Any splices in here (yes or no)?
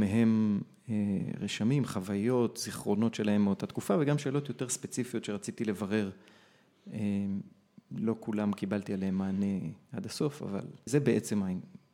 yes